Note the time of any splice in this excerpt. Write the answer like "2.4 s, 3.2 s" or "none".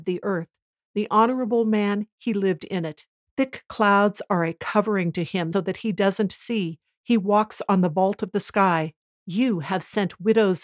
3.3 s, 5.5 s, 9.2 s